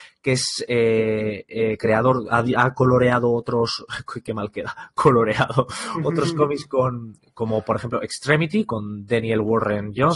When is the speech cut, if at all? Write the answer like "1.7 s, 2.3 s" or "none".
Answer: none